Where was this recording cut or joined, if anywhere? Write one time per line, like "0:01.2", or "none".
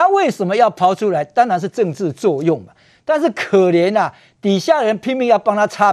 none